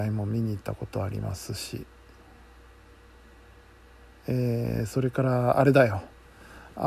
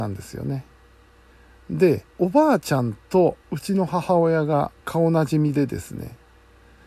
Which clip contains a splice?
second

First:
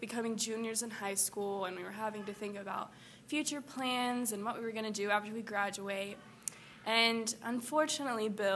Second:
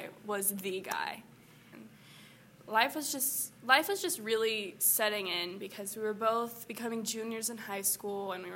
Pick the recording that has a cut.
second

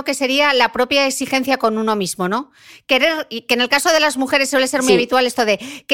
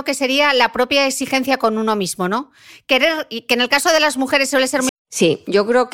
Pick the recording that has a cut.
second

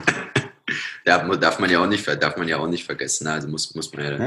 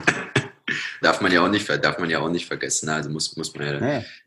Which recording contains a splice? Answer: second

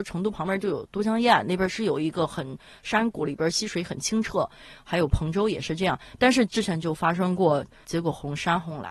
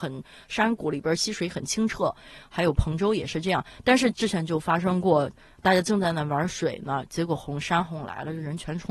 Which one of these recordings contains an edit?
first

